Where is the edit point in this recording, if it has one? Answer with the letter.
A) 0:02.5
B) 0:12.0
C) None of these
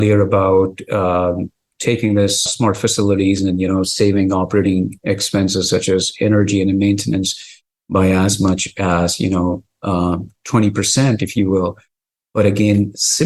A